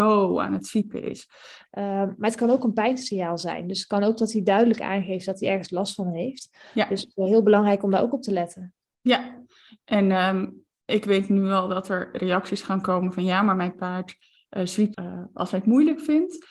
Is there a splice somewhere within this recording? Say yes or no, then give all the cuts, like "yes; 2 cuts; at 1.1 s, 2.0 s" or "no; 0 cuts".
yes; 2 cuts; at 1.7 s, 14.9 s